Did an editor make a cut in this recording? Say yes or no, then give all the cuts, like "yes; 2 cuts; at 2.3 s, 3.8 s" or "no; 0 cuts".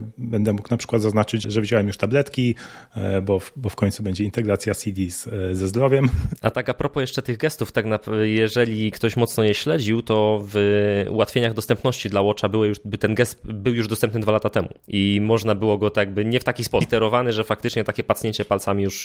yes; 2 cuts; at 1.4 s, 16.8 s